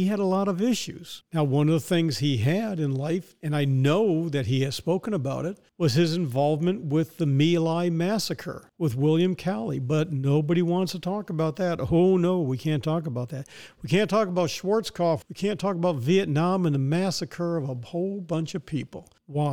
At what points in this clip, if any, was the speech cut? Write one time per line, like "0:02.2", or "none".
0:15.2